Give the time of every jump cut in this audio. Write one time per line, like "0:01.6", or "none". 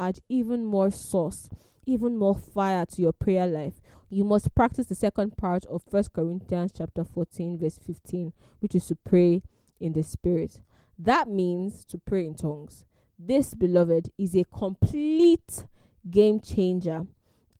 none

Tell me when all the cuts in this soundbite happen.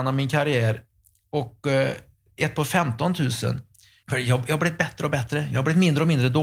0:04.0

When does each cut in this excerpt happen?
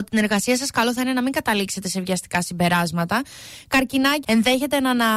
0:04.2

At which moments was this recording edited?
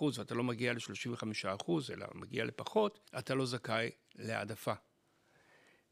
0:03.1

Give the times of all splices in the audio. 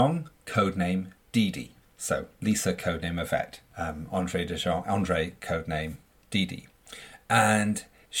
none

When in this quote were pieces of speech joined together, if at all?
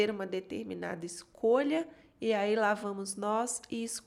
none

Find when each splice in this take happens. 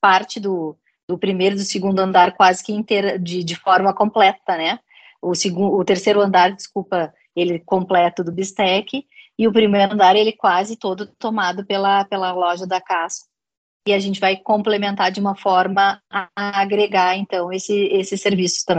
none

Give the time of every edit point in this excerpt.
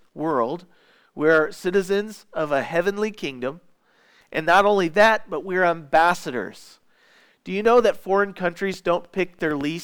none

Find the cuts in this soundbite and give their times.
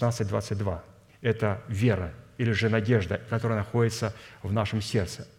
0:01.1
0:03.3

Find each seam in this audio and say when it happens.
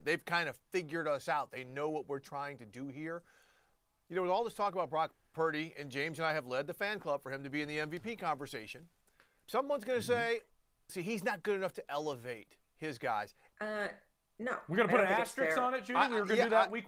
0:09.4
0:10.9
0:13.5

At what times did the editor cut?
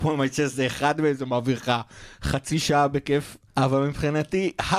0:03.5

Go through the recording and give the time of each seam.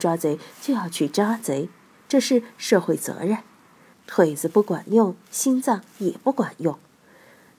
0:03.9

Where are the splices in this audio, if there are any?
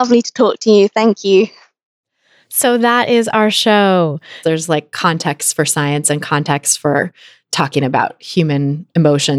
0:04.4
0:07.5

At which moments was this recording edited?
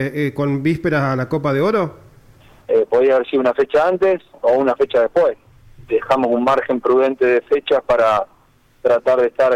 0:02.6
0:05.9

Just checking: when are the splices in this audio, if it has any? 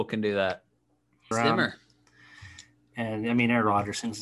0:01.3

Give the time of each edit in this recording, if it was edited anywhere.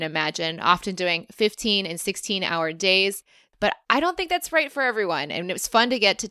none

